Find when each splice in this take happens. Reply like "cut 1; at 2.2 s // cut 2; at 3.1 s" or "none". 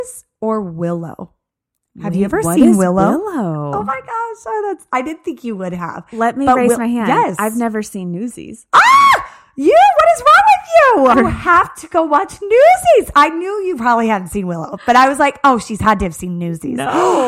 cut 1; at 11.1 s